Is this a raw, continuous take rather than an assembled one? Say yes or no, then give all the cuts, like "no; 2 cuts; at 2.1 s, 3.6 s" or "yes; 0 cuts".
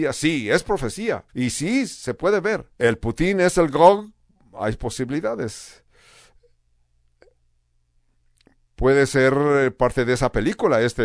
no; 2 cuts; at 1.3 s, 2.7 s